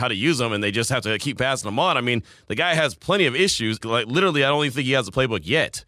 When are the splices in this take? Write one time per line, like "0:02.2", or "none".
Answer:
0:03.8